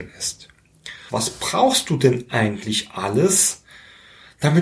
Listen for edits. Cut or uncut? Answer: cut